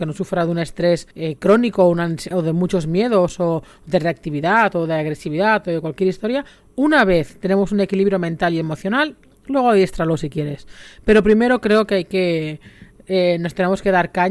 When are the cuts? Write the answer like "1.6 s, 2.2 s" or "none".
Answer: 1.1 s, 2.3 s